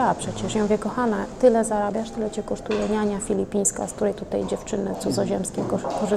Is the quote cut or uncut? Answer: uncut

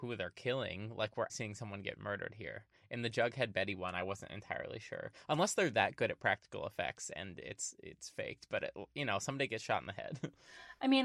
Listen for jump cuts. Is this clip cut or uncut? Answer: cut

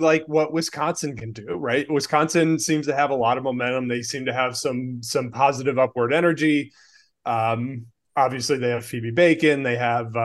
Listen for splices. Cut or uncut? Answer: uncut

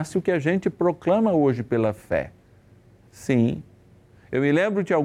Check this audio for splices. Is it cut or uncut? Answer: uncut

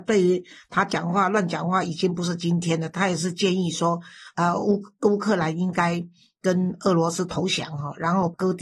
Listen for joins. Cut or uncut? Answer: uncut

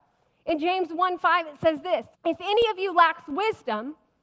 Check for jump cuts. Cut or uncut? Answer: cut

